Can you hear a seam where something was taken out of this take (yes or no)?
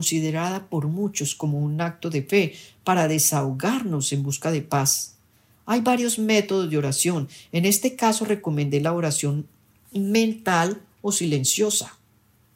no